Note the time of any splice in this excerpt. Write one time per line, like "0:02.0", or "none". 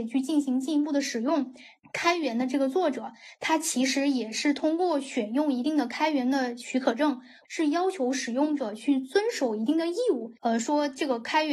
0:01.8
0:07.4
0:10.4